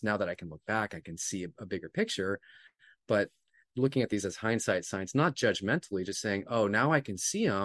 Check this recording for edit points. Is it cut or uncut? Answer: uncut